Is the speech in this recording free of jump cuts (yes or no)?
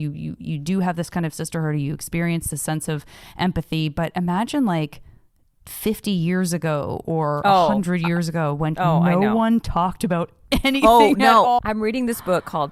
no